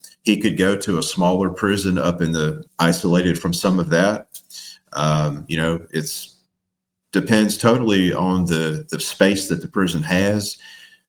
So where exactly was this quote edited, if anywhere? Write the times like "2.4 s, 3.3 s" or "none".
2.7 s